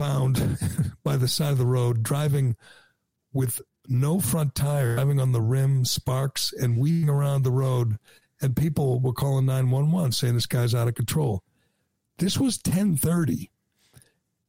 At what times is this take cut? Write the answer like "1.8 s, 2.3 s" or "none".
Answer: none